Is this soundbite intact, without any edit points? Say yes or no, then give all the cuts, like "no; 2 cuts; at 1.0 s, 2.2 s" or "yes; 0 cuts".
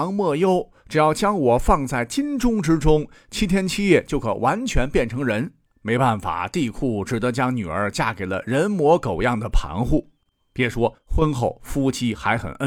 no; 1 cut; at 5.7 s